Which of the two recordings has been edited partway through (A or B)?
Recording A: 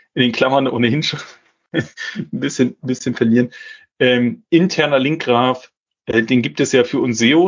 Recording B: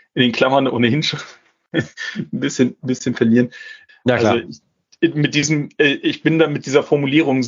B